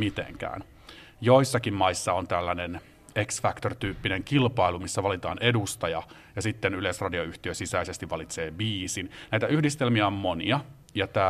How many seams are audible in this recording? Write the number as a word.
zero